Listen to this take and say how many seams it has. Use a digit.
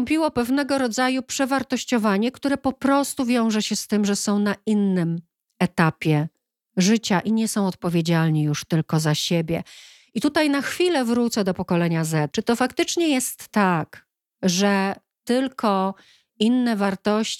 1